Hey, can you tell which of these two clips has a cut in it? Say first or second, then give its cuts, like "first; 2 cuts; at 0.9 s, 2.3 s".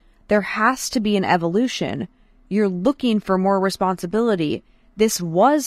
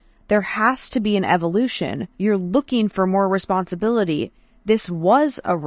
second; 1 cut; at 2.1 s